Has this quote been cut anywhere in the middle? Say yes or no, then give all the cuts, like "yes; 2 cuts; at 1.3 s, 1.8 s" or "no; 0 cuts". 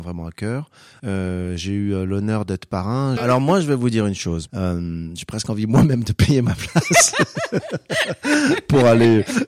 yes; 3 cuts; at 1.0 s, 3.2 s, 4.5 s